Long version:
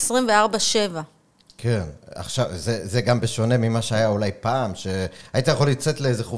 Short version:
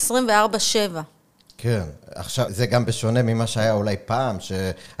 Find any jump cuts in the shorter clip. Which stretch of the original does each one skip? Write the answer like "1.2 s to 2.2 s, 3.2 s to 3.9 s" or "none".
2.5 s to 2.8 s